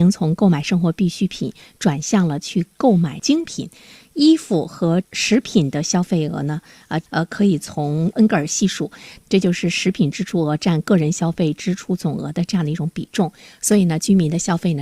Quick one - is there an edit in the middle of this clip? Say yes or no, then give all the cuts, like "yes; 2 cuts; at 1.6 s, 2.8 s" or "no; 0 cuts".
yes; 2 cuts; at 7.0 s, 9.2 s